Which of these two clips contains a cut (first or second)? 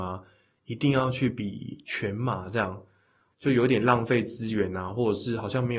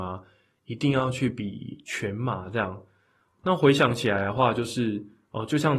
first